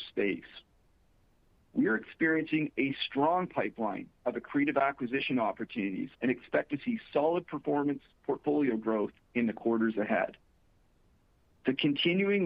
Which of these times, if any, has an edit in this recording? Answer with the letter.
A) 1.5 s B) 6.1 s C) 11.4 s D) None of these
B